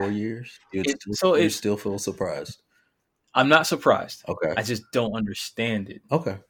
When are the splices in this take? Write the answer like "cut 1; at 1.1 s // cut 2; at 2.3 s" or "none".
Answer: none